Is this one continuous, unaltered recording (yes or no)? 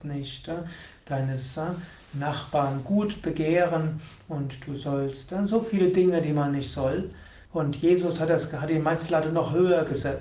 no